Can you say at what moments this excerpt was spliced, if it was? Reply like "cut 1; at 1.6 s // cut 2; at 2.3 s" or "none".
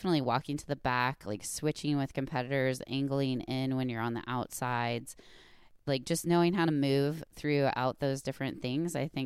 none